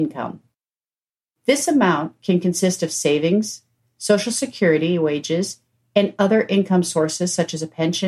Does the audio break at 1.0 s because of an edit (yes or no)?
no